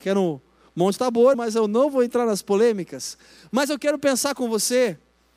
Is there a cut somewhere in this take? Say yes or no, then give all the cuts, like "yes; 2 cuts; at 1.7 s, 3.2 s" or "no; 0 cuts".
yes; 1 cut; at 1.3 s